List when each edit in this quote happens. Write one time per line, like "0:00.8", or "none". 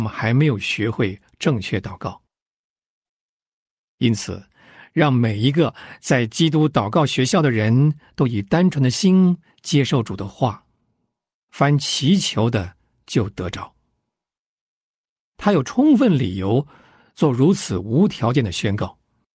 none